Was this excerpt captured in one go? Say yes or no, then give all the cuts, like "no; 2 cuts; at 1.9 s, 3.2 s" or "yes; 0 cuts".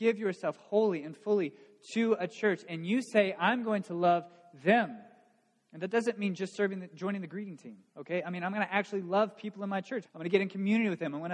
no; 1 cut; at 10.0 s